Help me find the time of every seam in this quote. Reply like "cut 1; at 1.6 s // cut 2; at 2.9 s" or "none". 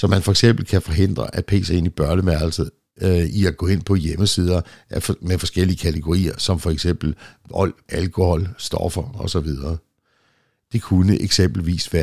cut 1; at 7.9 s // cut 2; at 10.6 s